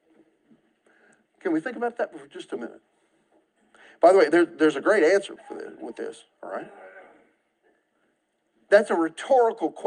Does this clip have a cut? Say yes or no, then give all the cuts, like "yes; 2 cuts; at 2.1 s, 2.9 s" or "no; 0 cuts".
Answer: no; 0 cuts